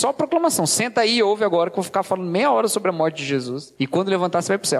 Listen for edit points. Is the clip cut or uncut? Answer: uncut